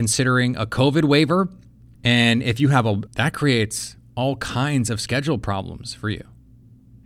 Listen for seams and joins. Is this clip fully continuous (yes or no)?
no